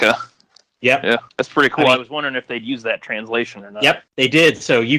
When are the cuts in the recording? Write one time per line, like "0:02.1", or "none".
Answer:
none